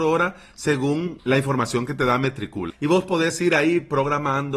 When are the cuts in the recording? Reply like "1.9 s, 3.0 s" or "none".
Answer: 1.2 s, 2.7 s